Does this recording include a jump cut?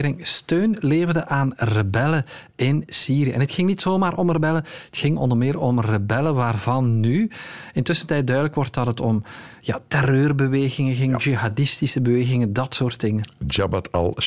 no; 0 cuts

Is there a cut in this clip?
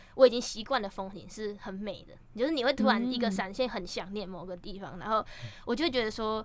no; 0 cuts

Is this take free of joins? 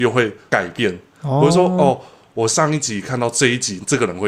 yes; 0 cuts

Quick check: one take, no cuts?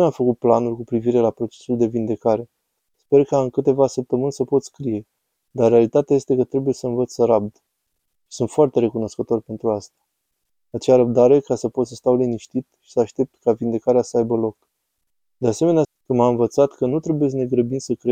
no; 1 cut; at 15.8 s

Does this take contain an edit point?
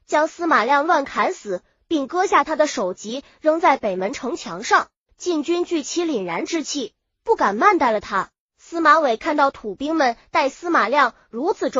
yes; 2 cuts; at 5.1 s, 8.4 s

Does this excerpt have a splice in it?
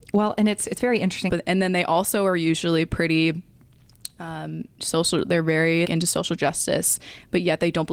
yes; 2 cuts; at 1.3 s, 5.8 s

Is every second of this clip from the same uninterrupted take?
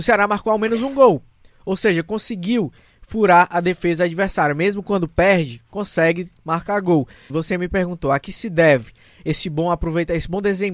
no; 1 cut; at 7.3 s

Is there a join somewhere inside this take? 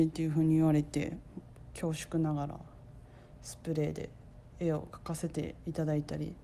no; 0 cuts

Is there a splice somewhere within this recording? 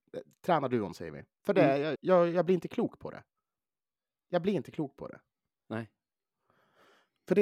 yes; 1 cut; at 1.9 s

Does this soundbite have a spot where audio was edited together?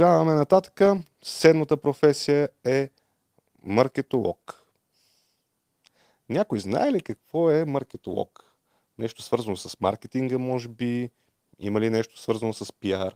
no; 0 cuts

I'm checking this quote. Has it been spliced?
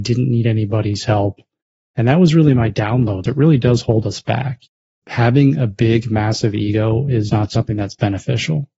yes; 2 cuts; at 3.2 s, 7.3 s

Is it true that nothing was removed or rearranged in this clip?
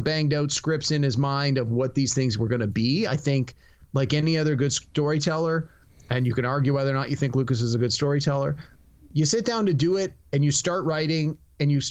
yes; 0 cuts

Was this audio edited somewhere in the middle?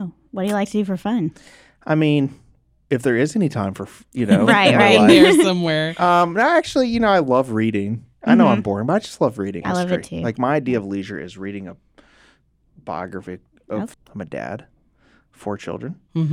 yes; 2 cuts; at 9.6 s, 13.9 s

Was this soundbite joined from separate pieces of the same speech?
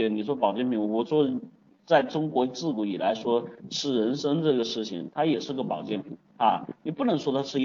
no; 0 cuts

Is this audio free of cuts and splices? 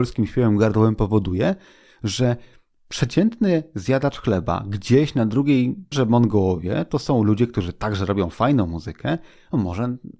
no; 1 cut; at 5.9 s

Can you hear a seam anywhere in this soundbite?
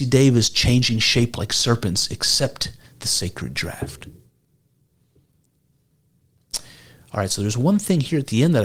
no; 0 cuts

